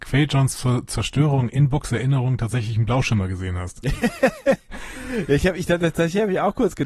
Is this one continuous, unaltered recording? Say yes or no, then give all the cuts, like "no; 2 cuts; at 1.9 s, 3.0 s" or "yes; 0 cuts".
yes; 0 cuts